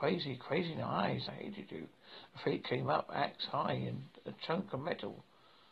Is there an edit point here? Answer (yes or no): yes